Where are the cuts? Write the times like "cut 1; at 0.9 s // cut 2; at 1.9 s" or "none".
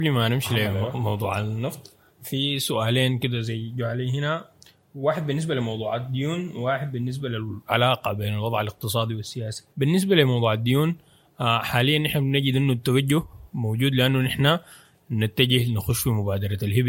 cut 1; at 2.2 s // cut 2; at 9.7 s